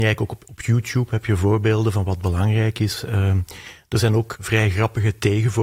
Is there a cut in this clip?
yes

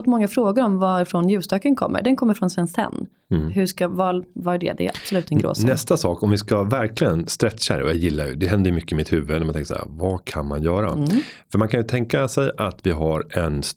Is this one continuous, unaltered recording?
yes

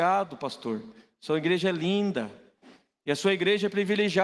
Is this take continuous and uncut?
yes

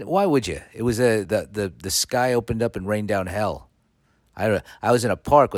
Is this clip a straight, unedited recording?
no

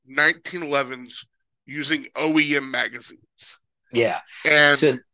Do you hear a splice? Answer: no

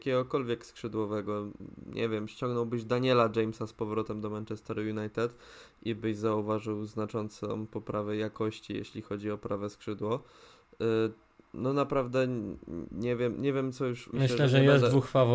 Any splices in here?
yes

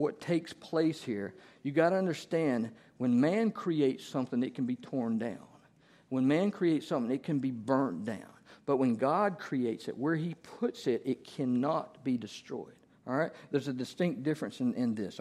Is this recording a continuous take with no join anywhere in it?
yes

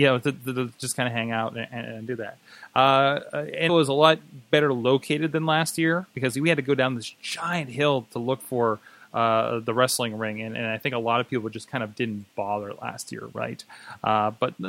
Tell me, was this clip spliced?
yes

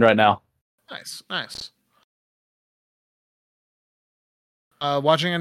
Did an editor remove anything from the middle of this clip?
no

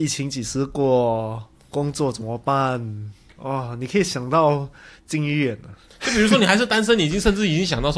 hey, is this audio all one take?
yes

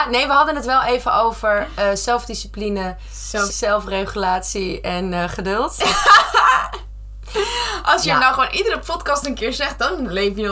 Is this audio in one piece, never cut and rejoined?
no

